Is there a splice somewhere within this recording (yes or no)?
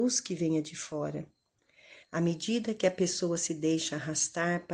yes